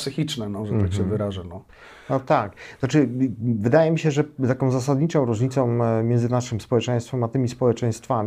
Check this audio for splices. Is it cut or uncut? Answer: uncut